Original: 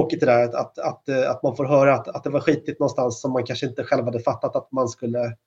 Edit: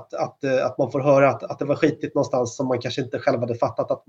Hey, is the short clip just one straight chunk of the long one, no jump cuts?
yes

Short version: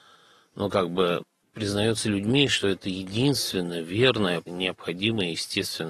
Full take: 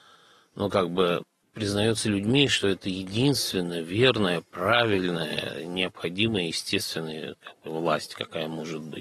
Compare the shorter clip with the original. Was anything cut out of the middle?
yes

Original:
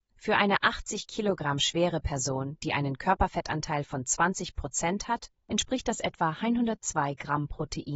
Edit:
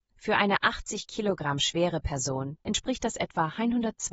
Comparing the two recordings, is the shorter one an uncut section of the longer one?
no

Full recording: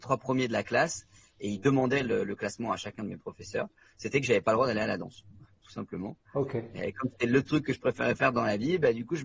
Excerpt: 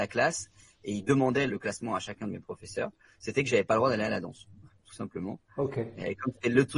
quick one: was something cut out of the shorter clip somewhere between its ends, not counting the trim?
yes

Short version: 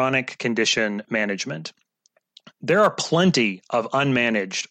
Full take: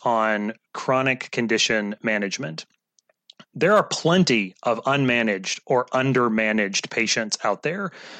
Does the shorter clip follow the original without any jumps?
yes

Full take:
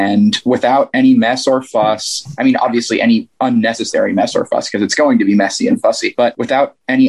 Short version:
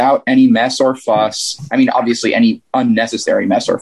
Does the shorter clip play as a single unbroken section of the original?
yes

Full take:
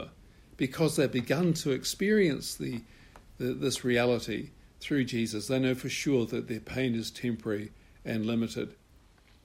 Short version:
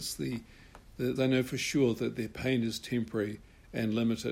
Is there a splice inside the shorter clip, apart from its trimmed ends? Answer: yes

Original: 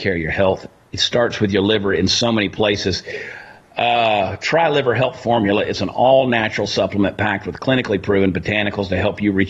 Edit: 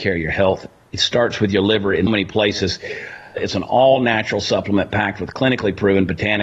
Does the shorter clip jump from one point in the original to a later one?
yes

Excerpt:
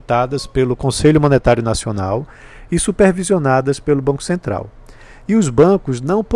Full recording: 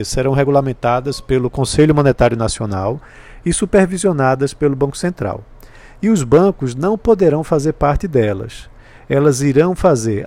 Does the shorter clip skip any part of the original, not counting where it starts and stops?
no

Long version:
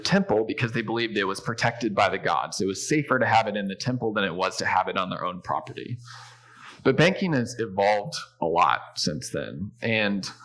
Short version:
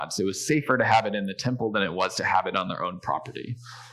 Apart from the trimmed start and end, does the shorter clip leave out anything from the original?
no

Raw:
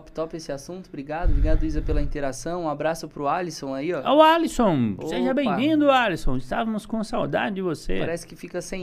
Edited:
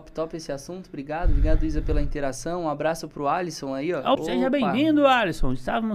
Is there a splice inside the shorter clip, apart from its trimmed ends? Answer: yes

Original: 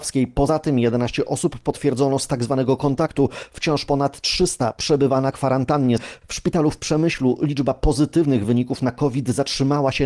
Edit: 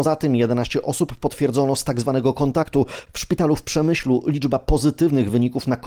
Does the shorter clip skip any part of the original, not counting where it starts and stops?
yes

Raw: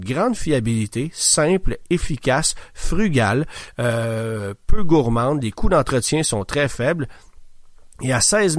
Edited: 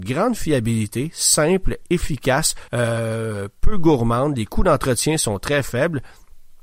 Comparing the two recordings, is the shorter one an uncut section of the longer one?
no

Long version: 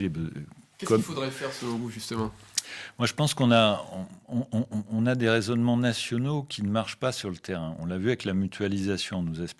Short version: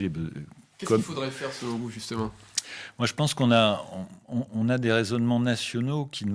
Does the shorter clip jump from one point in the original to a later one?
yes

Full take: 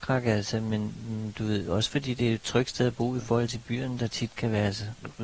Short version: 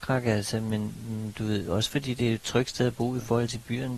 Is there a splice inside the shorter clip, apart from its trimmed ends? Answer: no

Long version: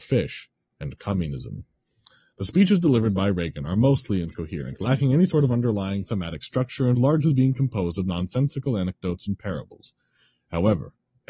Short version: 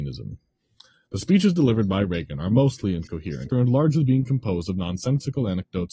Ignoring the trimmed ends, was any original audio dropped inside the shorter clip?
yes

